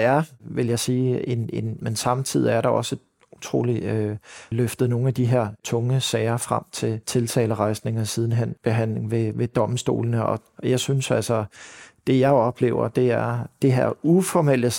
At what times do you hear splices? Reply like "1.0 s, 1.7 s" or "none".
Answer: 1.8 s, 4.5 s